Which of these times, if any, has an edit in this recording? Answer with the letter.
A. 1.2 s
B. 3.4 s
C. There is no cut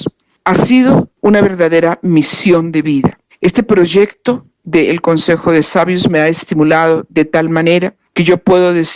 A